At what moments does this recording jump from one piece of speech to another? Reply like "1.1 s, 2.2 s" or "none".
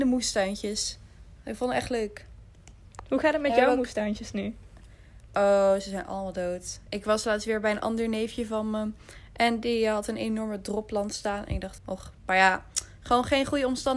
11.8 s